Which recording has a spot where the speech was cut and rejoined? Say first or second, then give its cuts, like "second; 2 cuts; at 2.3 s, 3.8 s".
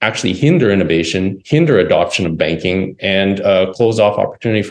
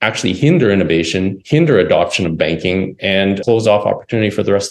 second; 1 cut; at 3.4 s